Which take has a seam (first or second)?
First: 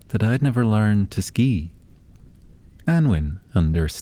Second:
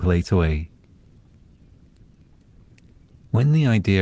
first